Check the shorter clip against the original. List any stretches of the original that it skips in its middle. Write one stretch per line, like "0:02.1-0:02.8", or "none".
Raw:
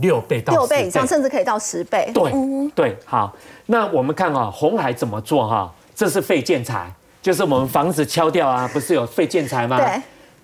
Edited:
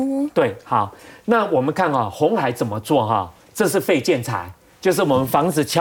none